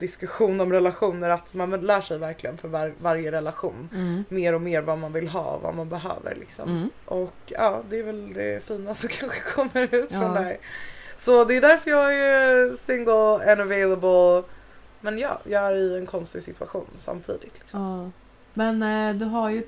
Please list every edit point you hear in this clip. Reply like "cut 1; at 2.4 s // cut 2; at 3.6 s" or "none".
none

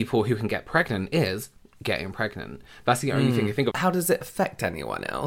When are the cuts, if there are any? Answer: cut 1; at 3.7 s

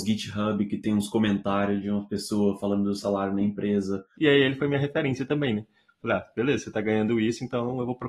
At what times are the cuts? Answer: cut 1; at 4.1 s

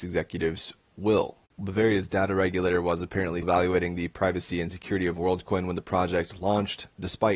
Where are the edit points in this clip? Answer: cut 1; at 1.5 s // cut 2; at 3.4 s

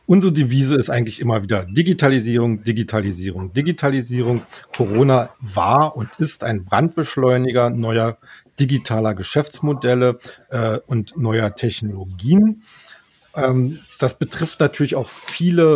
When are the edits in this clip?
none

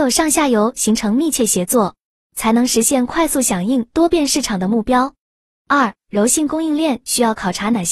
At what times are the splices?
none

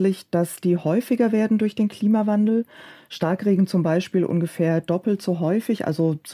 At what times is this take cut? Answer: none

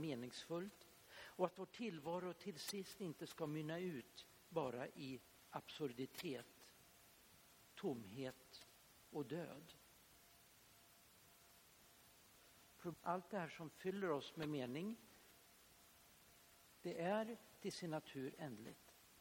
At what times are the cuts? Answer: cut 1; at 12.9 s // cut 2; at 16.8 s

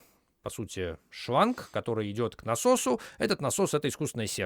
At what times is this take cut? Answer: none

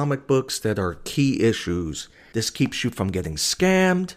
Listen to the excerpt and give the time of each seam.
cut 1; at 2.3 s

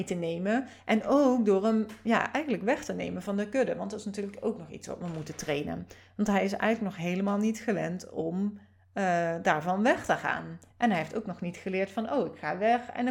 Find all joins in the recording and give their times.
none

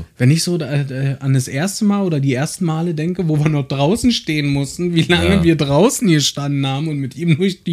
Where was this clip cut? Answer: none

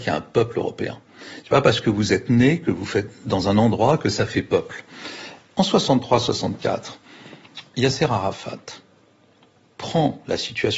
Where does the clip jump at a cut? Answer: none

